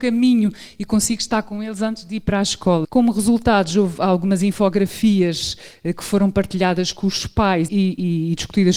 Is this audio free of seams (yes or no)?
no